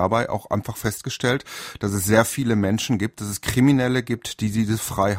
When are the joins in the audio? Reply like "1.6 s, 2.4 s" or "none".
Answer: none